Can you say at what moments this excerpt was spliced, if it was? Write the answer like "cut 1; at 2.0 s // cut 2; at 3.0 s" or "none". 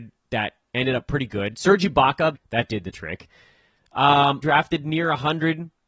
cut 1; at 2.3 s // cut 2; at 4.4 s